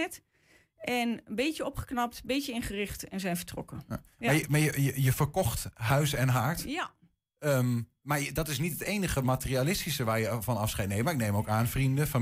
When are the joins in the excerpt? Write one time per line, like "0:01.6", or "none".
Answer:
none